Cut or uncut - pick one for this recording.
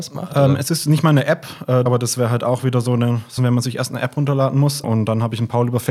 cut